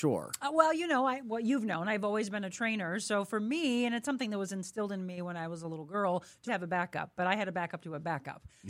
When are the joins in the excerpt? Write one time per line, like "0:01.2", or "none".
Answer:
0:06.5